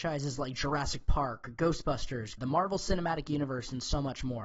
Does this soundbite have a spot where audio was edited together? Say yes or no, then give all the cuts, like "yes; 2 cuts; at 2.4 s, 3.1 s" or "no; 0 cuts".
yes; 1 cut; at 2.4 s